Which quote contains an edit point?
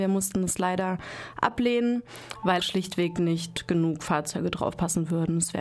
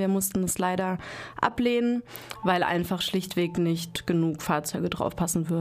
first; 1 cut; at 2.6 s

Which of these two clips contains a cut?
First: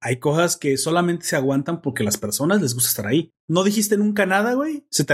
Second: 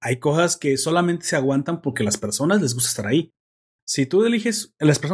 first; 1 cut; at 3.4 s

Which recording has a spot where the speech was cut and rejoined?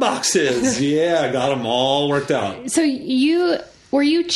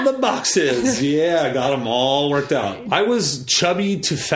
second; 1 cut; at 2.8 s

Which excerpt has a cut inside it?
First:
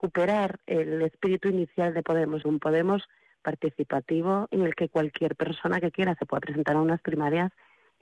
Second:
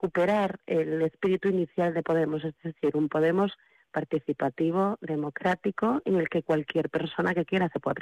first; 2 cuts; at 2.4 s, 4.5 s

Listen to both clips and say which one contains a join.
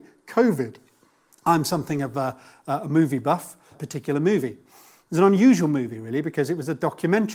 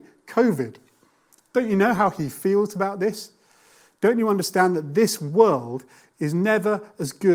first; 2 cuts; at 1.4 s, 3.7 s

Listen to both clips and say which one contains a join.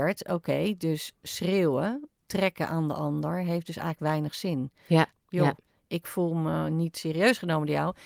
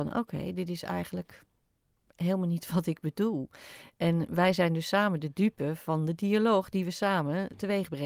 first; 2 cuts; at 2.2 s, 5.1 s

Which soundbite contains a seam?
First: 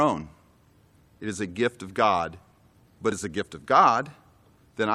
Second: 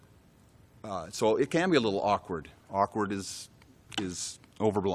second; 1 cut; at 2.6 s

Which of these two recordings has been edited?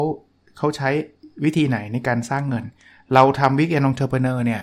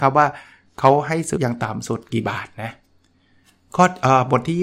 second; 1 cut; at 1.4 s

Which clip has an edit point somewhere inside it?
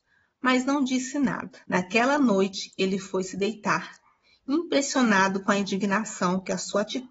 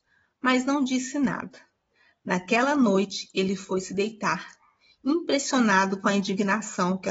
first; 1 cut; at 1.6 s

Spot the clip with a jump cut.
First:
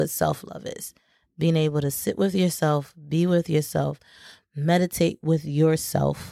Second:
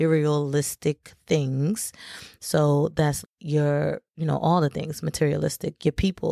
second; 1 cut; at 3.2 s

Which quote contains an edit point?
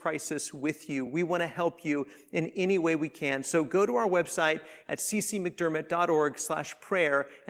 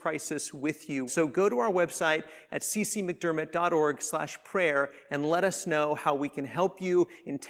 second; 1 cut; at 1.1 s

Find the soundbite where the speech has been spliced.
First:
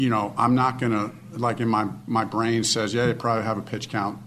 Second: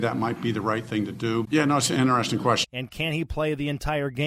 second; 2 cuts; at 1.4 s, 2.6 s

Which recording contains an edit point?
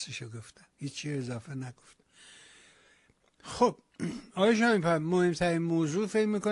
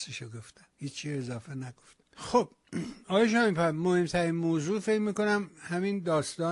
second; 1 cut; at 2.0 s

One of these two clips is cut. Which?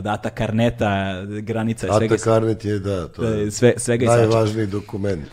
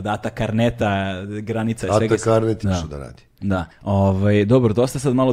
second; 1 cut; at 2.6 s

